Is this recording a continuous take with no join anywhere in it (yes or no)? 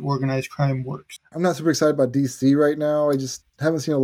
no